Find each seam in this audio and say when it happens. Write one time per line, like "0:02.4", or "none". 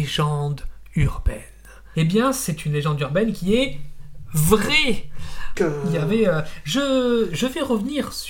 0:01.9
0:05.5